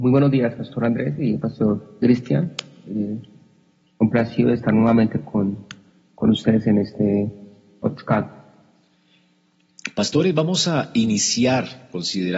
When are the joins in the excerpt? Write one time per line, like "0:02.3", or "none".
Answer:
none